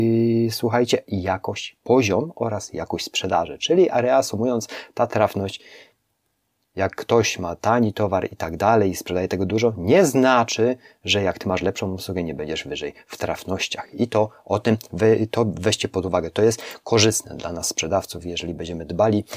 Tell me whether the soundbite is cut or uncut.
uncut